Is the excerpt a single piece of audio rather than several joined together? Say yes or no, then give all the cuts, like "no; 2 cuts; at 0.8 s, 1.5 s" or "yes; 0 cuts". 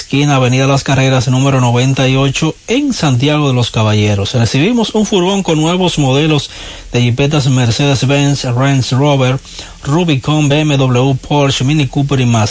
yes; 0 cuts